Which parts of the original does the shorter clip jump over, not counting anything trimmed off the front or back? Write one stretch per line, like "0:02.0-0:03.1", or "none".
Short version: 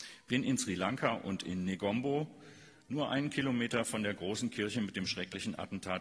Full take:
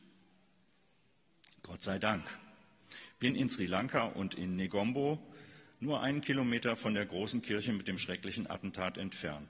none